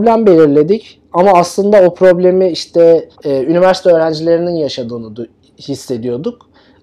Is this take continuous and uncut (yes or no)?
no